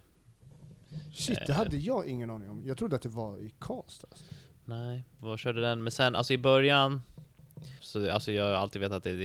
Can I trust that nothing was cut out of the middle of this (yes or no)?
no